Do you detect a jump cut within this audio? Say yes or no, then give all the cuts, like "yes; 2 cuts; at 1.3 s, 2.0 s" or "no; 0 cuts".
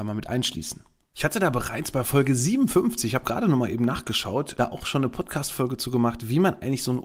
no; 0 cuts